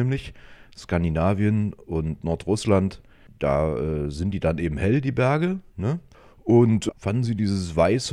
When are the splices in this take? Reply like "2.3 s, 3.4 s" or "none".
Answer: 6.9 s

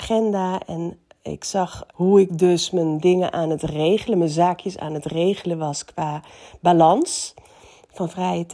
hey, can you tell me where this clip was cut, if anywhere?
1.9 s

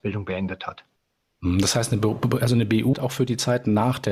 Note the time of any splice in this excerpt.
2.9 s

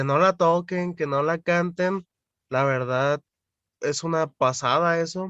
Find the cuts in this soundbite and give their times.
none

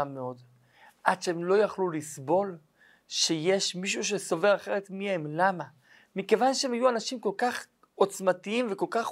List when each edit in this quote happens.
none

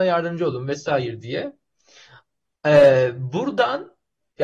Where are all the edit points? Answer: none

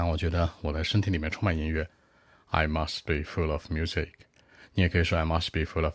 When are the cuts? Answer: none

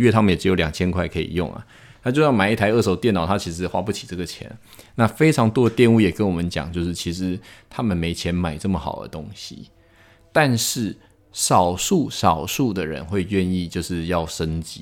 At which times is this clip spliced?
none

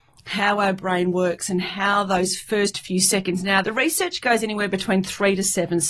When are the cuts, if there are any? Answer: 3.6 s

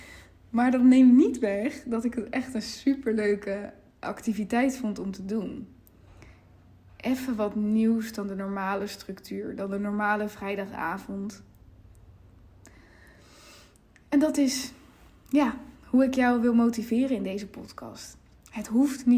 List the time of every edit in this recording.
none

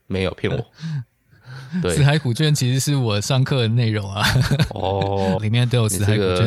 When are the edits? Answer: 5.4 s

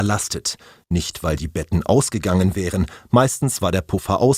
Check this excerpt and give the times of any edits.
none

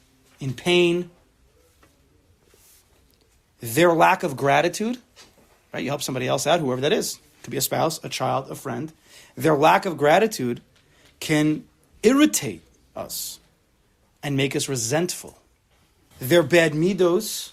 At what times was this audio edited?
16.1 s

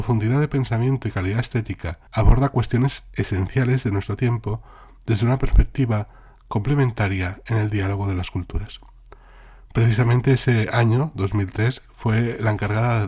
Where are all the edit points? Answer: 2.1 s

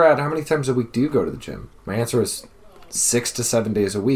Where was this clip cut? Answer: 1.8 s

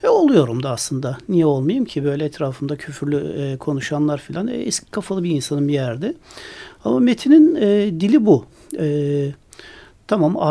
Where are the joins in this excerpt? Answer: none

